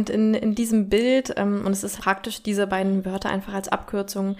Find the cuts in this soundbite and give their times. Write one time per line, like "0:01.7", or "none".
0:02.0

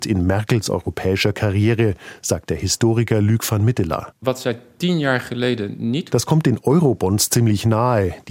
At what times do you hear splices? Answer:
0:06.1

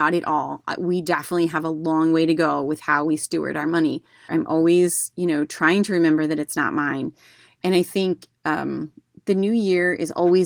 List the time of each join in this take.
0:04.3

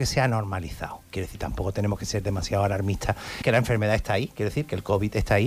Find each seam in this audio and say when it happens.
0:03.4

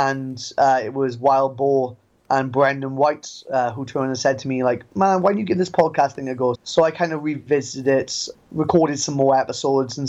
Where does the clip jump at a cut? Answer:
0:06.5
0:08.3

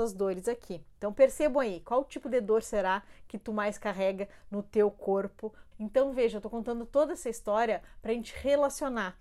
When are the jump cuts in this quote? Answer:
0:05.7

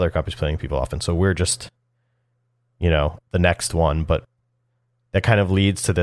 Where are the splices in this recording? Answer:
none

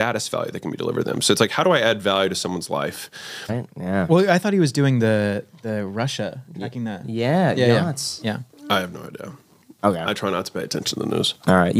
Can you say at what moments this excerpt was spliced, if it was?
0:03.5
0:08.5

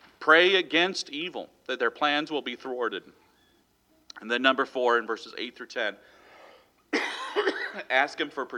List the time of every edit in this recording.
none

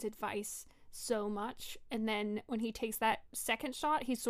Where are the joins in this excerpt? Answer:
none

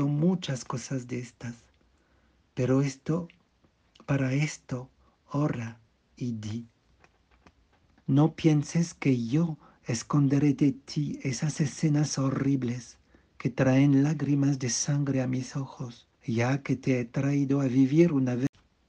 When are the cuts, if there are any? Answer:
0:08.0
0:16.2

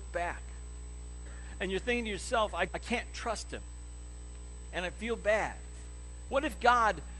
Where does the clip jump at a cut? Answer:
0:02.7
0:04.7
0:06.3

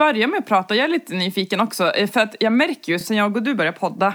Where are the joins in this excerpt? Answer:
none

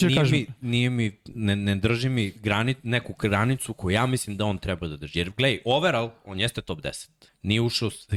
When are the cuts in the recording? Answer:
0:07.3

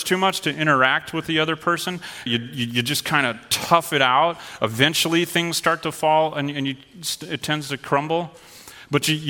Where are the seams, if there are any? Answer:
0:02.3

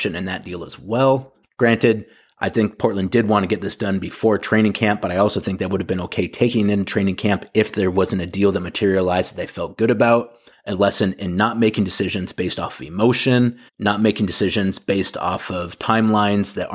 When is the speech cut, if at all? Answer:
0:01.4
0:10.5
0:13.7

